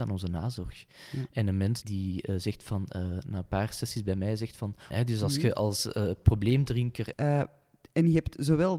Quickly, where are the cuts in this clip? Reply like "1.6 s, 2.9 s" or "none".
1.8 s, 4.9 s, 7.1 s

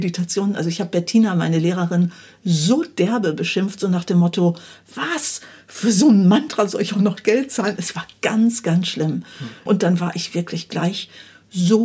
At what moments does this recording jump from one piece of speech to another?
9.7 s

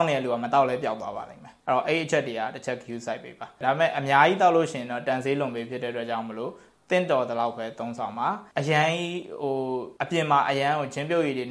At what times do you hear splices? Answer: 1.6 s, 8.5 s, 10.0 s

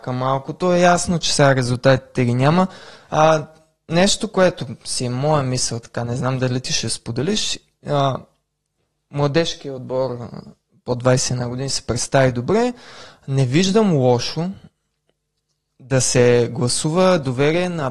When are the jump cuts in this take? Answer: 3.0 s

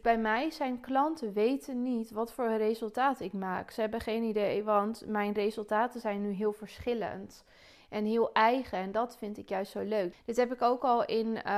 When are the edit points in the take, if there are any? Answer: 10.1 s

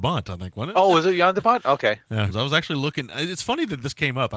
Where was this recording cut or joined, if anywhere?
2.3 s

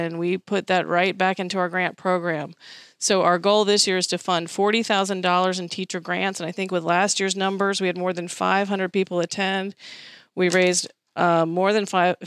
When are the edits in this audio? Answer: none

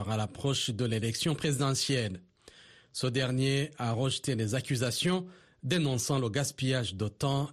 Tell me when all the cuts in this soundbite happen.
none

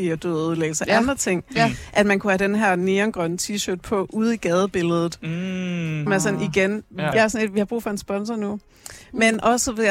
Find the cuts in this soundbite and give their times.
6.1 s, 7.1 s

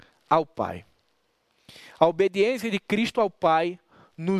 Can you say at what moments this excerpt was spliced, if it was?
none

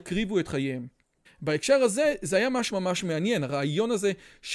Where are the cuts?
1.2 s, 2.7 s

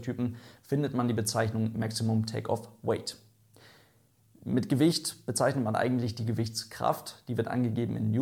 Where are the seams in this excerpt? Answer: 4.3 s

